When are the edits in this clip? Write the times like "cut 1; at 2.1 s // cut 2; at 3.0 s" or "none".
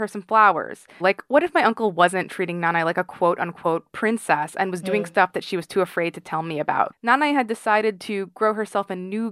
cut 1; at 1.0 s // cut 2; at 6.9 s